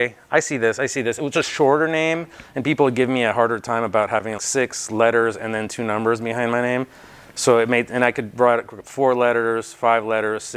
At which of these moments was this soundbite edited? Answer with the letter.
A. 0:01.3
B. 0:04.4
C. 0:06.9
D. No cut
B